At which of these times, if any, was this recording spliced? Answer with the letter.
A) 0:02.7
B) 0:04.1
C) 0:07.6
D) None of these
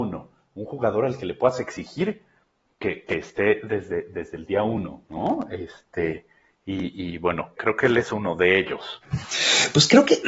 C